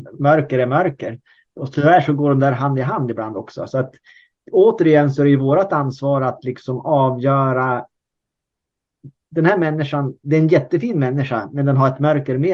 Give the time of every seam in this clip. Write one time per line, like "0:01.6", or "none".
none